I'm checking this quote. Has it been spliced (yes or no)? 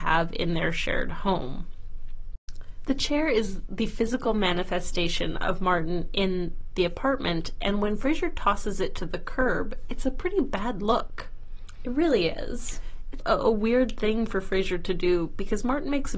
yes